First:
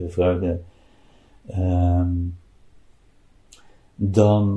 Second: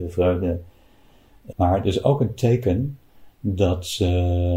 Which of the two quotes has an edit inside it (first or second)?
second